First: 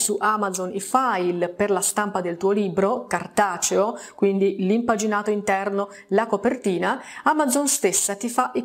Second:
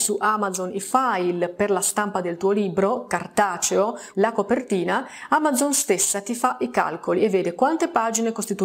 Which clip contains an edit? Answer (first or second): second